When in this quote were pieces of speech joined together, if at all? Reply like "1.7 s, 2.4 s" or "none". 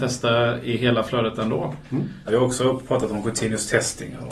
2.3 s